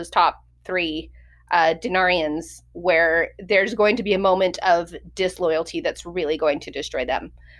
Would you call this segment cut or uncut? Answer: uncut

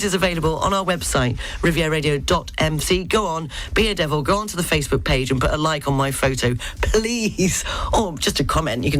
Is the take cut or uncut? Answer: uncut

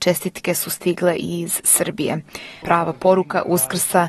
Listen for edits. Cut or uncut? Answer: cut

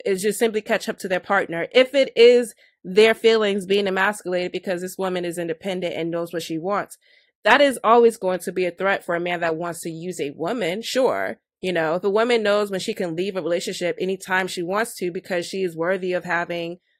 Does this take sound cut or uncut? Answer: uncut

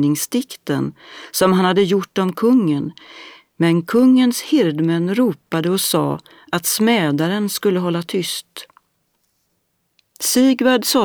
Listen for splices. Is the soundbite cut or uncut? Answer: uncut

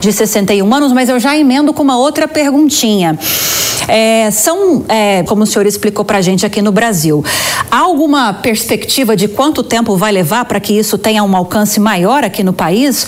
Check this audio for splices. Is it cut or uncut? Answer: cut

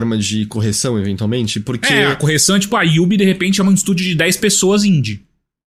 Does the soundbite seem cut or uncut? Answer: uncut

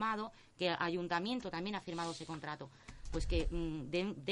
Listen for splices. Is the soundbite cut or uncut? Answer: uncut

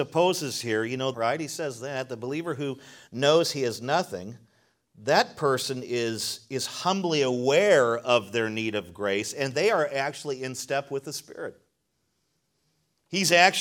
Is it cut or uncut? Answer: cut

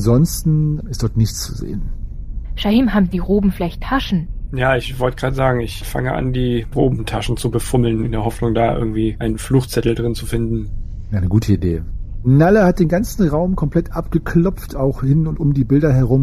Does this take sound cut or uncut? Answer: cut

